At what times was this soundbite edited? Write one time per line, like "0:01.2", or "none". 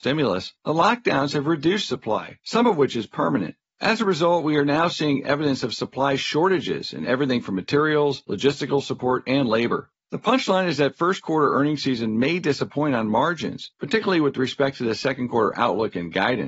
none